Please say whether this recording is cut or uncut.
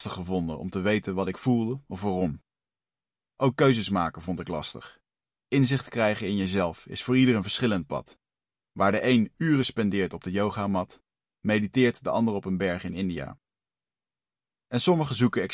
uncut